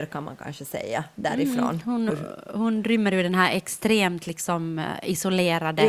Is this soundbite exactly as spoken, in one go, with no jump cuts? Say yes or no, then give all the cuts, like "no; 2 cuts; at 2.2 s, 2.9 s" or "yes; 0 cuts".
no; 1 cut; at 2.1 s